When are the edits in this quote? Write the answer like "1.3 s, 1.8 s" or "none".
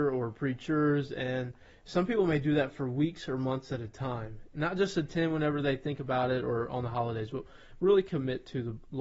4.5 s